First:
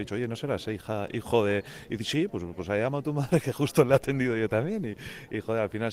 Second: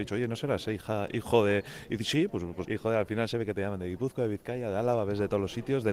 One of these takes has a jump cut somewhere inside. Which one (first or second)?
second